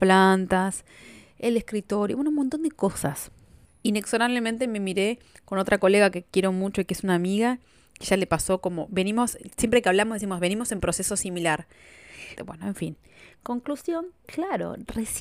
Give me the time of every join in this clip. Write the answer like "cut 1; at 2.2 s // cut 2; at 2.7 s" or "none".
cut 1; at 3.6 s // cut 2; at 12.4 s // cut 3; at 14.2 s